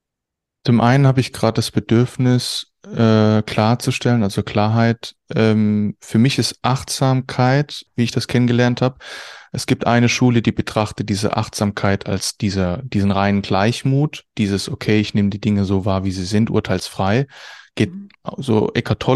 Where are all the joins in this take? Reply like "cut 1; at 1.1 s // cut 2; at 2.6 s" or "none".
cut 1; at 7.9 s